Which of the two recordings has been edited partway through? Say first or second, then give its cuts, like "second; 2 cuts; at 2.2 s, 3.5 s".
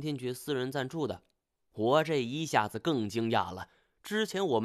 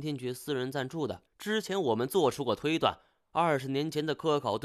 second; 1 cut; at 1.3 s